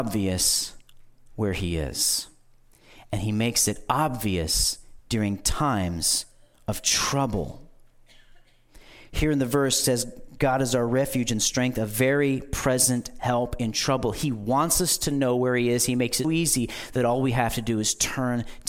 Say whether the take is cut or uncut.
cut